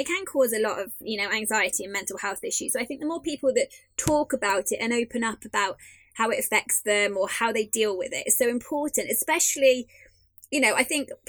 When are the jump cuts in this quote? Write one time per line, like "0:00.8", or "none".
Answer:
none

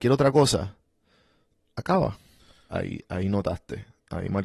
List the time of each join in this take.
0:02.7

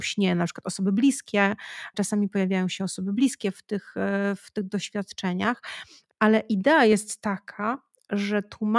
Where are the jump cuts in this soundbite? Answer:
0:01.9
0:06.1

